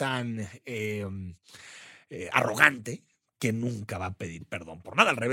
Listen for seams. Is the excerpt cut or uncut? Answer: uncut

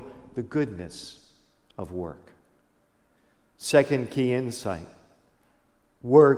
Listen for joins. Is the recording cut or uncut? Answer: uncut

